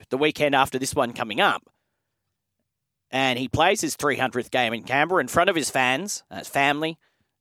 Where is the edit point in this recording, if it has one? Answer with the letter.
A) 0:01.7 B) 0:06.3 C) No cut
B